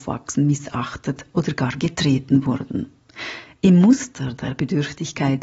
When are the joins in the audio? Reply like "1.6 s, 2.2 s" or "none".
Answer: 3.6 s